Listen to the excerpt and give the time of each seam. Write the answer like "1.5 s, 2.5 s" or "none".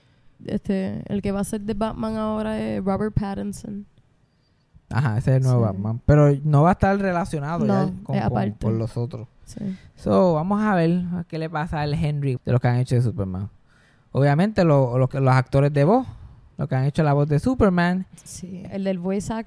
12.4 s